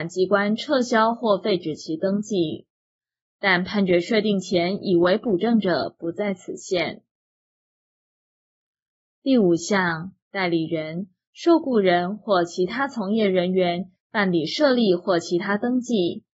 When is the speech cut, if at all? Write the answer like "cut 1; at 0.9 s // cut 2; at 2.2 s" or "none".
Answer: cut 1; at 10.2 s // cut 2; at 14.0 s